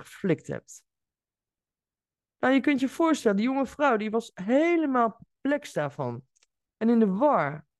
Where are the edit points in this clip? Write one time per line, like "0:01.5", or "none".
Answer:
none